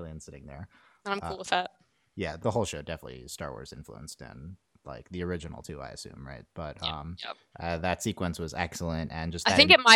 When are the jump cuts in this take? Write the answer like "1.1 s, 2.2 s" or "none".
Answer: 2.4 s, 7.5 s